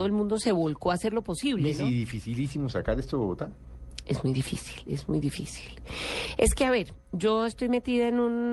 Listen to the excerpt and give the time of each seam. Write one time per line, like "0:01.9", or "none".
none